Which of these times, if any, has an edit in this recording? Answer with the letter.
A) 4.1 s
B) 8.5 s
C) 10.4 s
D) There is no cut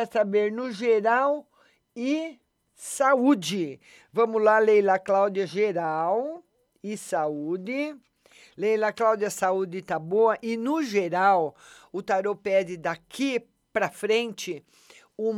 D